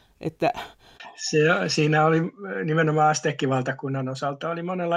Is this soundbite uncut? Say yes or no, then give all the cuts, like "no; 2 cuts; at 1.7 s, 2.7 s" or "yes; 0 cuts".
yes; 0 cuts